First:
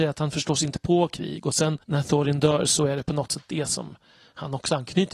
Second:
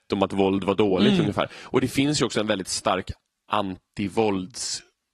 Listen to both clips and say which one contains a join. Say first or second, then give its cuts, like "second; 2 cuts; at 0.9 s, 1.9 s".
first; 1 cut; at 1.8 s